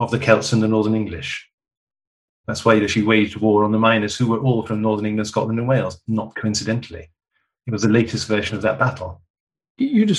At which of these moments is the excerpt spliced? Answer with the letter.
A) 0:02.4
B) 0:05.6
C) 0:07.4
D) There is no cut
A